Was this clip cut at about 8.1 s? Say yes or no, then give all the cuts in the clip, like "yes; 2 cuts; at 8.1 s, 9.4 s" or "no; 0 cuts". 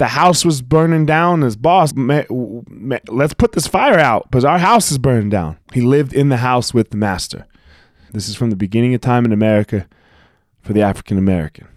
yes; 3 cuts; at 1.9 s, 5.7 s, 8.1 s